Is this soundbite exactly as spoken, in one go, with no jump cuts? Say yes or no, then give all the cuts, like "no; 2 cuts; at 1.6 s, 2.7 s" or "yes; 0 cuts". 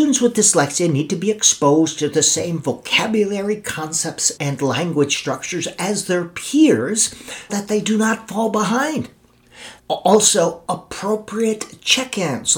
no; 3 cuts; at 4.4 s, 7.5 s, 9.8 s